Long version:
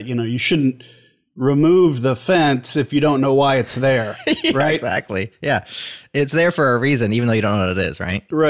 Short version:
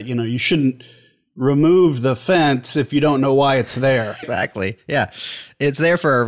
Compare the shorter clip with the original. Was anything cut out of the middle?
yes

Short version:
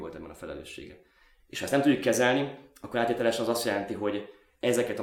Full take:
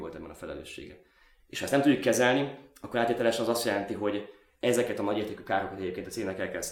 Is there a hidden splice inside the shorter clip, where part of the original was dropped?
no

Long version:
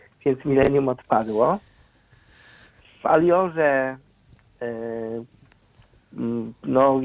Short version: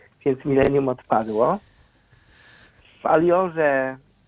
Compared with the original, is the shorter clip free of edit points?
yes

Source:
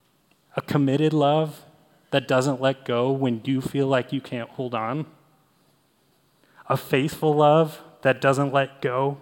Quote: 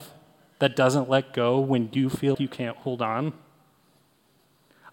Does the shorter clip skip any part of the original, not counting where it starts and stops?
yes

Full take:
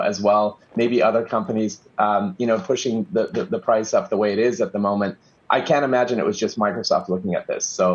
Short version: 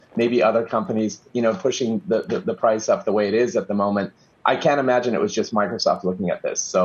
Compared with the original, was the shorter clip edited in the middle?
yes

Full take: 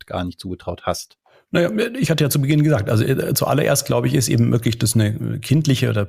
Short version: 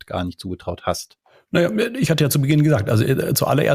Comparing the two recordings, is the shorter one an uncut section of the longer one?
yes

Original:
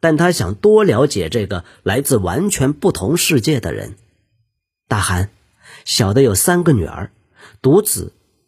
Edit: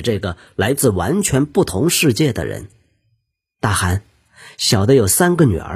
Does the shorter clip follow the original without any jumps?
yes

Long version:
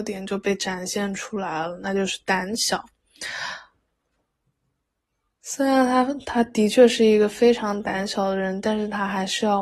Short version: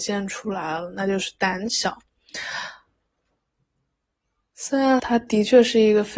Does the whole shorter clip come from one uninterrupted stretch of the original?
no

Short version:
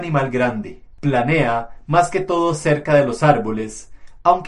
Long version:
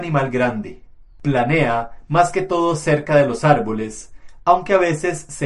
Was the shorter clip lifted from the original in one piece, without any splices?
no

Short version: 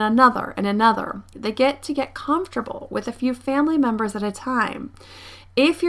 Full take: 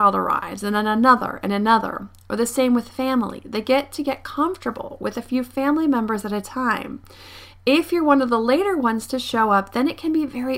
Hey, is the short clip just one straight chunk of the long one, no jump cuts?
no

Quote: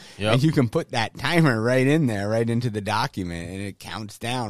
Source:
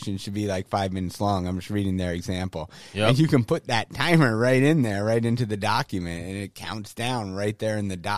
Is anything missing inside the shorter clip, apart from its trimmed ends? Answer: no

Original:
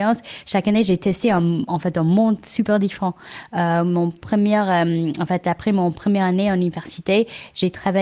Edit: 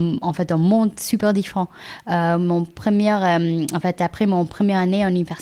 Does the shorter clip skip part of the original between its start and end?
no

